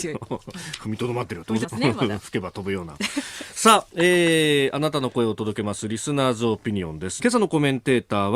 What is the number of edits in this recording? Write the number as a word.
two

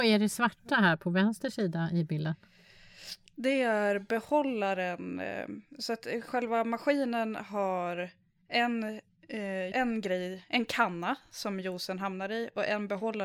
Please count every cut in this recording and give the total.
one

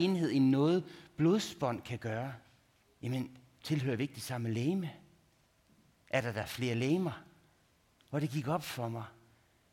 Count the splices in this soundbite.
two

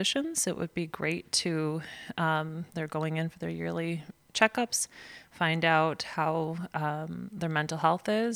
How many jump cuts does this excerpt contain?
zero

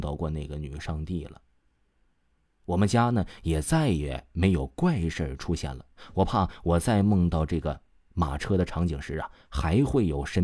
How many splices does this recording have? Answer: zero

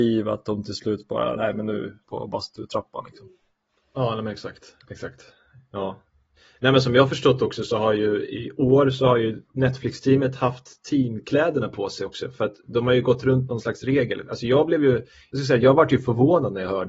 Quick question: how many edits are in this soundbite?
one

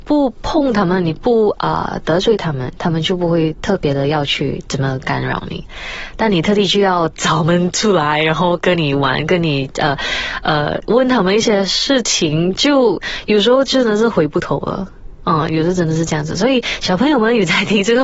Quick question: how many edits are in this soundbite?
zero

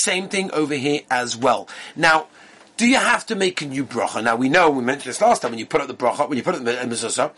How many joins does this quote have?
zero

